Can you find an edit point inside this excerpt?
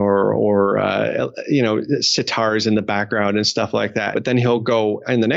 yes; 1 cut; at 4.1 s

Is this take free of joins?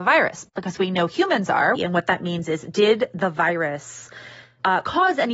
no; 1 cut; at 1.8 s

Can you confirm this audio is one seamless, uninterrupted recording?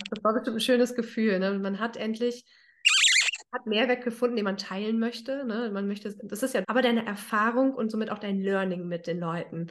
no; 1 cut; at 6.6 s

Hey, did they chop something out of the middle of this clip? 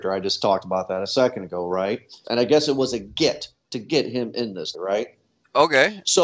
yes; 2 cuts; at 2.2 s, 4.7 s

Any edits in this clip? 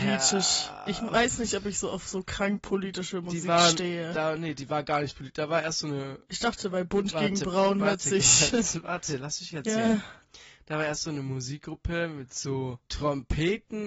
yes; 1 cut; at 12.9 s

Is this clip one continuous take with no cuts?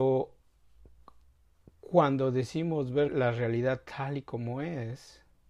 no; 1 cut; at 3.1 s

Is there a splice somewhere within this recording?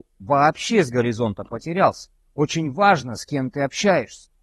yes; 1 cut; at 2.2 s

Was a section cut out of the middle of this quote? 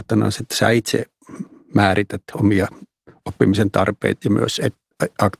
yes; 1 cut; at 4.2 s

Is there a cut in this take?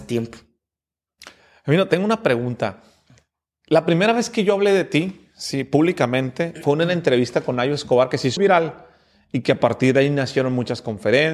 yes; 1 cut; at 8.4 s

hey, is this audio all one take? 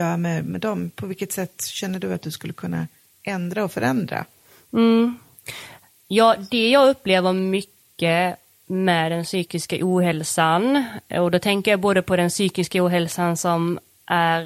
yes; 0 cuts

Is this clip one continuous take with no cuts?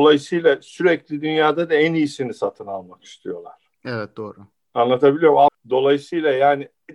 no; 1 cut; at 5.5 s

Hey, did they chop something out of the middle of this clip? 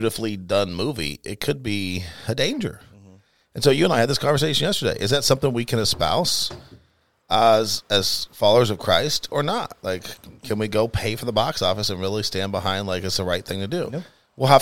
no; 0 cuts

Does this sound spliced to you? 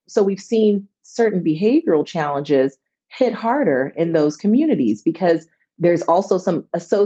no; 0 cuts

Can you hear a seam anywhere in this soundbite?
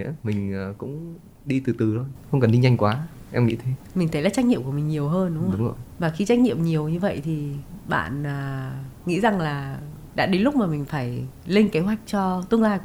no; 0 cuts

